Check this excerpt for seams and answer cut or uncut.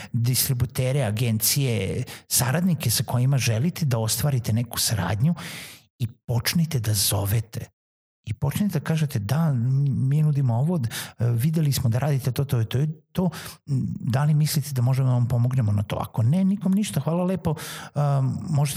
uncut